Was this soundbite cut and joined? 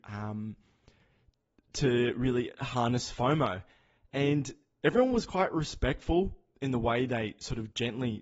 no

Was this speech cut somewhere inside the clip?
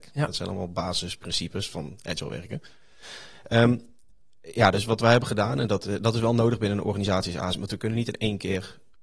no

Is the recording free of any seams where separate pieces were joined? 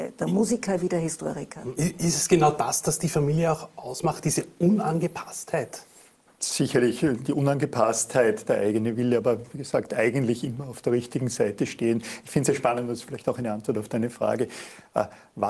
yes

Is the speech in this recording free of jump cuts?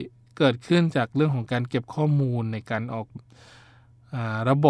no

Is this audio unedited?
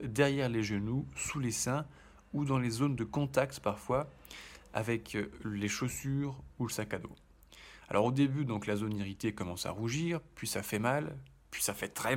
yes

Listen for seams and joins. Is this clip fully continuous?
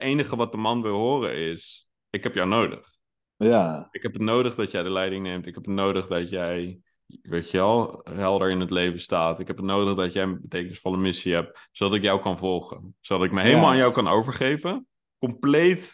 yes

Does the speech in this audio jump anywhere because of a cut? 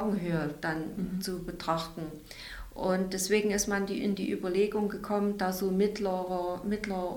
no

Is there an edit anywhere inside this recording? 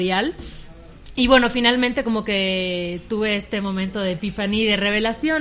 no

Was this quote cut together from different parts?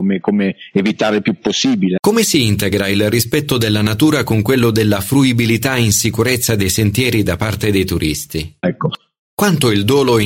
yes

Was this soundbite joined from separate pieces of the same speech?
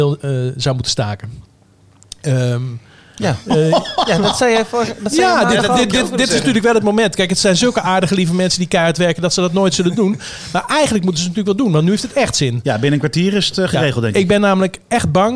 no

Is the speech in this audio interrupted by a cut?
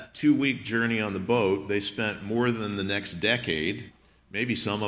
no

